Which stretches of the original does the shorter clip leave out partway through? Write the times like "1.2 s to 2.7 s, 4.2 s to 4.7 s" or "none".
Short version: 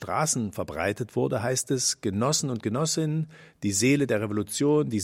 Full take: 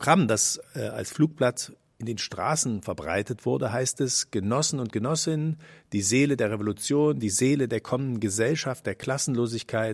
none